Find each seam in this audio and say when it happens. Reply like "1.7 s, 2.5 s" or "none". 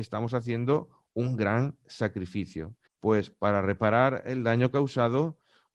2.9 s